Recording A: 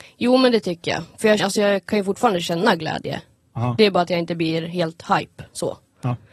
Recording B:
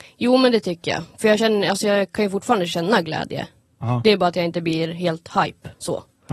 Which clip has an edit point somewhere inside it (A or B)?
A